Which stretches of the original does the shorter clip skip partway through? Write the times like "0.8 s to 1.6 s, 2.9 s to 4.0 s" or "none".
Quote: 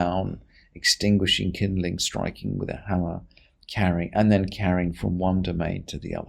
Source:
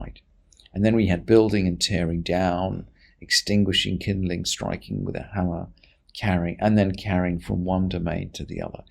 none